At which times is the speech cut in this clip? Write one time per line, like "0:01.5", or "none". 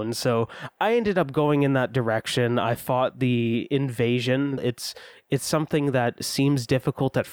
0:04.6